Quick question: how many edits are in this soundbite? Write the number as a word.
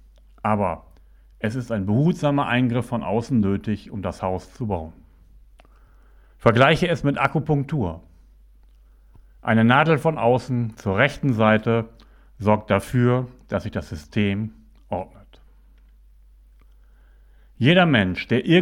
zero